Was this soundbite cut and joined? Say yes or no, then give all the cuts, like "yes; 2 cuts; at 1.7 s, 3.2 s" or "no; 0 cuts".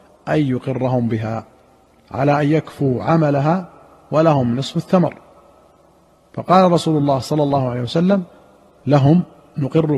no; 0 cuts